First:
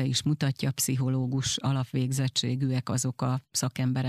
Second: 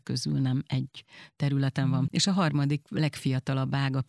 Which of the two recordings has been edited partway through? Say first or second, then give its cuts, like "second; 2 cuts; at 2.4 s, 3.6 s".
second; 1 cut; at 2.1 s